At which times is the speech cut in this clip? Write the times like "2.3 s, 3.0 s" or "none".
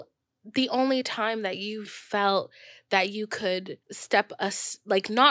1.8 s, 3.8 s

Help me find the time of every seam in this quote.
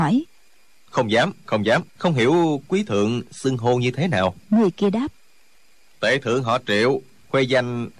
1.9 s, 4.4 s

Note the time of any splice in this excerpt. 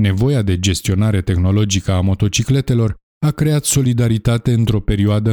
none

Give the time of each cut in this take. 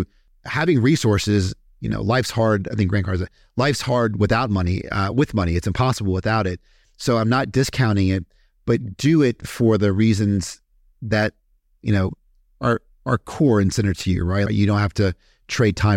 14.5 s

